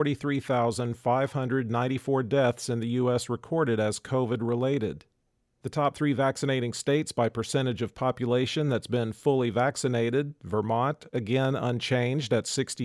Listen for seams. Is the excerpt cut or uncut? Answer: uncut